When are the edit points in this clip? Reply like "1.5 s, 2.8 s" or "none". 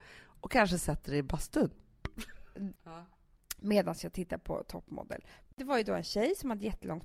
2.8 s, 5.5 s

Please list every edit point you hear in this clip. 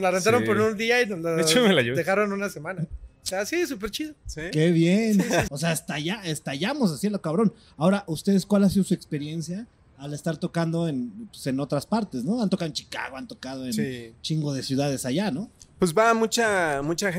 5.5 s

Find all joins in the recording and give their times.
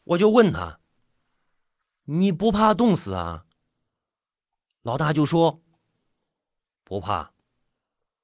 none

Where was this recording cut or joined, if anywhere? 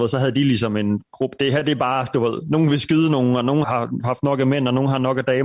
3.6 s

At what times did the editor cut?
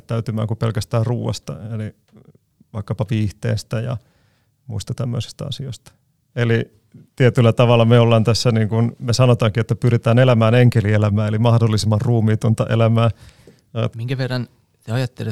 6.3 s, 13.9 s

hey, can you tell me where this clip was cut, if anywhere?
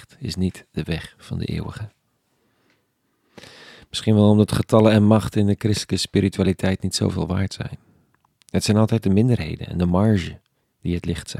none

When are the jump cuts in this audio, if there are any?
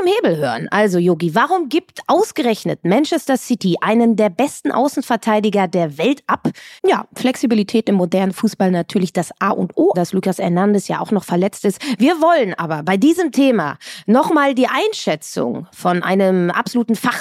6.8 s, 9.9 s

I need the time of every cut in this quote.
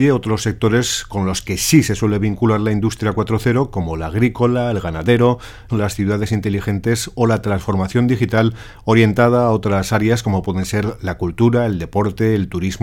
5.7 s

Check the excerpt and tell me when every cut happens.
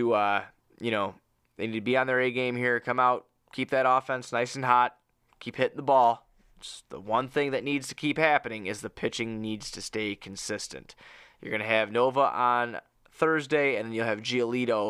none

